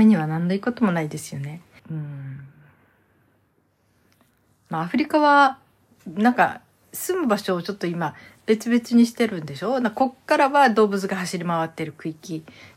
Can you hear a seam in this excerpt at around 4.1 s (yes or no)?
no